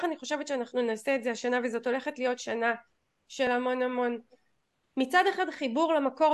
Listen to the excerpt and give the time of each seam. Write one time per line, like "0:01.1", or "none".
none